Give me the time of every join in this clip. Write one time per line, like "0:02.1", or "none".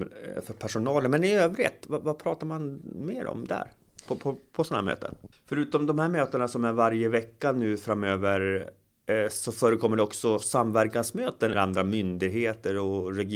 0:05.3
0:11.5